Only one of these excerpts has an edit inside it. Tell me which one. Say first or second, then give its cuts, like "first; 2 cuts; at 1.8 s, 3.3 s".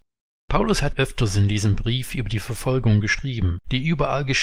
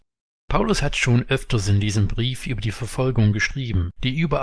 first; 1 cut; at 0.9 s